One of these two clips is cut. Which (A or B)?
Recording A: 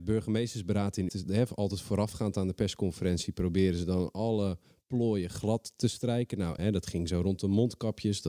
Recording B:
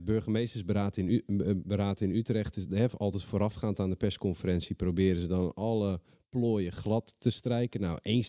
A